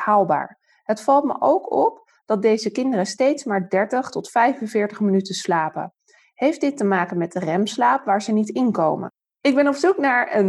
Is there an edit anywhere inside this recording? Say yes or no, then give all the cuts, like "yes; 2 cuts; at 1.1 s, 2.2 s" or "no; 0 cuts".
no; 0 cuts